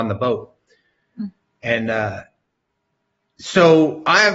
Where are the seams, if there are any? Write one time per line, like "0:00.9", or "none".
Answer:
none